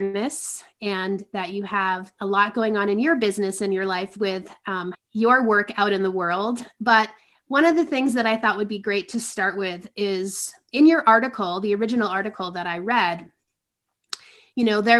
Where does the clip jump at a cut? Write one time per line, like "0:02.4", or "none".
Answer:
0:04.9